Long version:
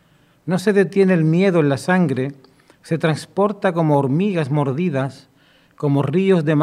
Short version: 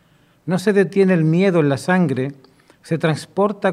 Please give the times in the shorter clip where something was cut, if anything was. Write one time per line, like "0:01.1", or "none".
none